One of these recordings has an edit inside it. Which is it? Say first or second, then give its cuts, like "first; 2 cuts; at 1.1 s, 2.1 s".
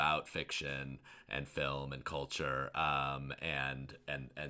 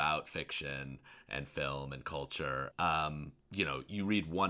second; 1 cut; at 2.7 s